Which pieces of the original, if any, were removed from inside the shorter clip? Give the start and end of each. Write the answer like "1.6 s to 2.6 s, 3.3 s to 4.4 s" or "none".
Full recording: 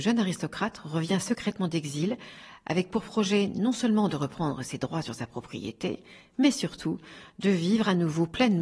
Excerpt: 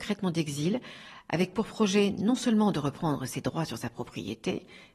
none